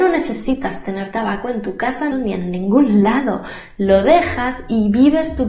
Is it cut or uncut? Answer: cut